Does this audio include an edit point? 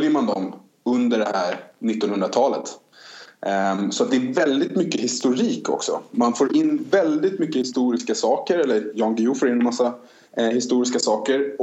no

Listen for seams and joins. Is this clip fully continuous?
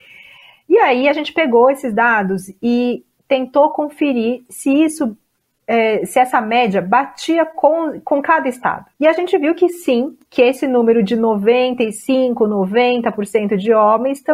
no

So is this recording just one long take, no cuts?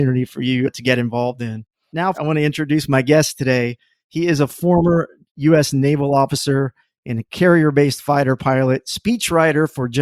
no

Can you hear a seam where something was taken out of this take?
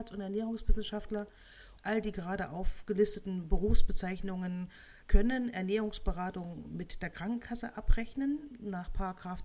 yes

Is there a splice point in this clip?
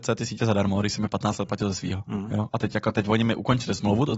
no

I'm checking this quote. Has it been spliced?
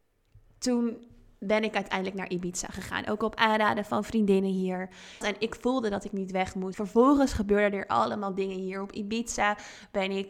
yes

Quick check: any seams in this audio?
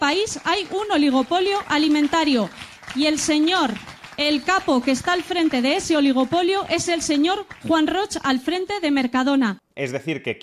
no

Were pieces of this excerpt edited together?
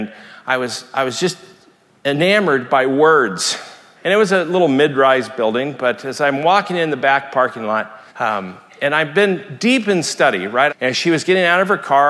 yes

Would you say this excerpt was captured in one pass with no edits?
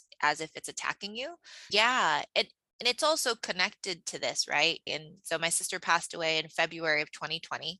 no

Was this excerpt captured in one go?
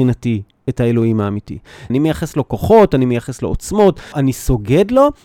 no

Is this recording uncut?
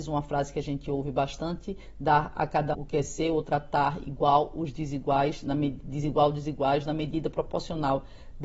no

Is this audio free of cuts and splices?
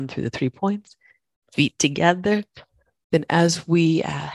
no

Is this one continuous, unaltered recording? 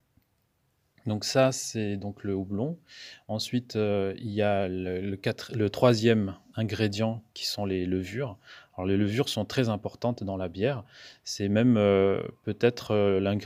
yes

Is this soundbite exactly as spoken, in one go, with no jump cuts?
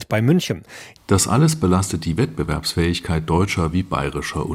no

